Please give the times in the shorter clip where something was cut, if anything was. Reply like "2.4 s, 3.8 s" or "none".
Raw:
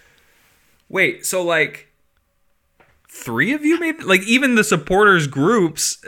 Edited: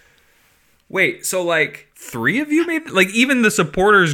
1.9 s